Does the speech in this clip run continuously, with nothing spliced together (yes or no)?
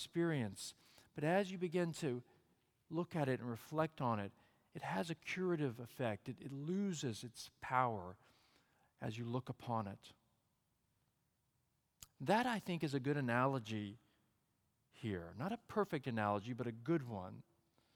yes